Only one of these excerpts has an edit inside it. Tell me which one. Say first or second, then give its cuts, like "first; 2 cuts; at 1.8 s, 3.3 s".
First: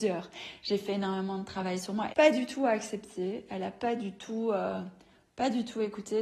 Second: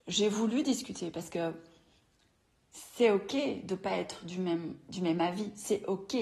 first; 1 cut; at 2.1 s